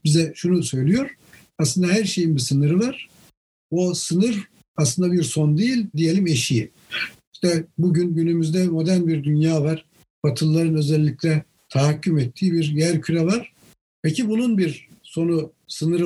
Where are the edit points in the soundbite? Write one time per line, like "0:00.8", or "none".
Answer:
0:05.9
0:07.2